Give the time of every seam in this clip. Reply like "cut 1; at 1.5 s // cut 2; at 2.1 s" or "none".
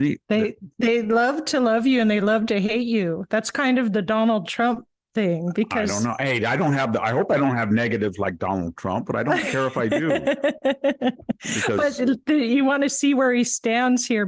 none